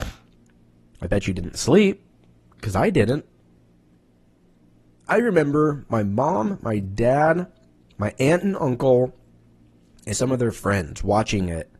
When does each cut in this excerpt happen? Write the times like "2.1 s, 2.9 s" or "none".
10.1 s